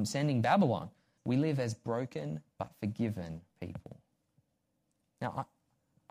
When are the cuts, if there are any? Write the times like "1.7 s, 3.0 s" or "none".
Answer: 1.2 s, 2.5 s